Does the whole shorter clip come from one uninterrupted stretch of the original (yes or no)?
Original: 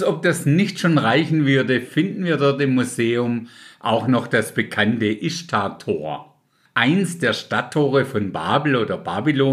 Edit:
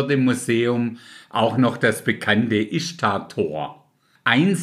yes